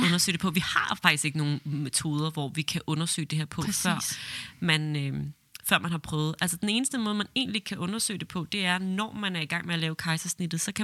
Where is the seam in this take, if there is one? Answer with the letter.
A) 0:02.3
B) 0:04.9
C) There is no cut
C